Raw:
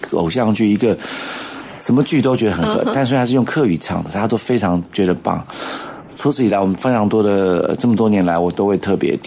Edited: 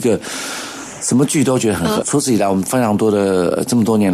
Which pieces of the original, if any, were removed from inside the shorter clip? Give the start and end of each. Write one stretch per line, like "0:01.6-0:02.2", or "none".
0:02.8-0:06.1

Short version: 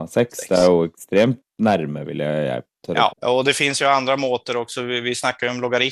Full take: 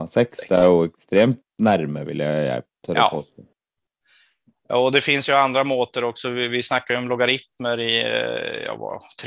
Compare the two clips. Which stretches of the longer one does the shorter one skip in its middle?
0:03.1-0:04.6

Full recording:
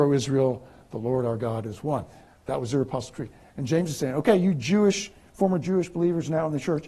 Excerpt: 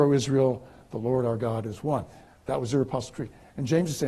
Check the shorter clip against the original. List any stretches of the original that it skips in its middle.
none

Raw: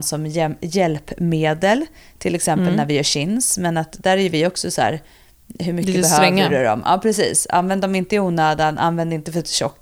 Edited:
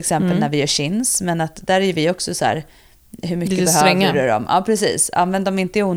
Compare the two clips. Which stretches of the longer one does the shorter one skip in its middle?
none

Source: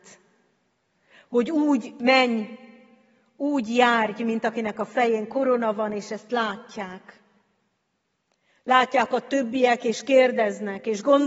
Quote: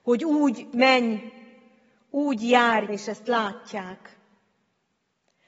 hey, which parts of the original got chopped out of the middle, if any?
0:04.1-0:05.9

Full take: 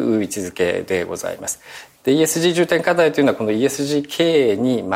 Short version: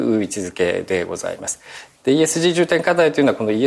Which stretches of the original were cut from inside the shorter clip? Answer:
none

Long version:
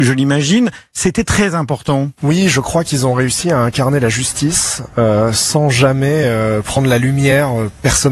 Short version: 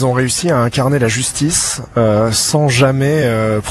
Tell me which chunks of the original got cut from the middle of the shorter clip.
none

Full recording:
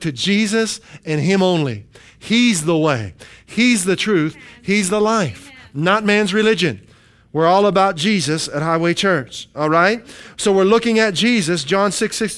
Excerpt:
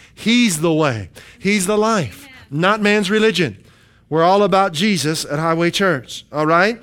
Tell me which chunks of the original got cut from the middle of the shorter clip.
0:03.4-0:04.6

